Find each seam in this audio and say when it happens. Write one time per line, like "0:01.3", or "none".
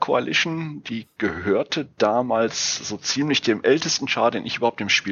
none

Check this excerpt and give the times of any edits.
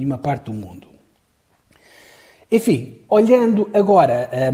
none

